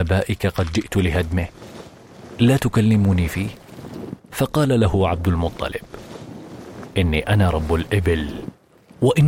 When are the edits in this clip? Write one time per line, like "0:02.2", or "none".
0:04.2